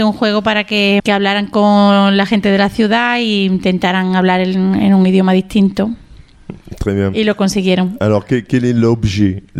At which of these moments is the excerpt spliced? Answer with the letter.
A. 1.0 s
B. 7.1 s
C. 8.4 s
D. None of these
A